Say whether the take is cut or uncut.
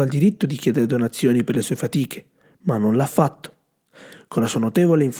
uncut